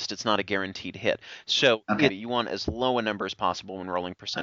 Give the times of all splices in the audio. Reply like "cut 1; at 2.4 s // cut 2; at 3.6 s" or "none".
cut 1; at 2.1 s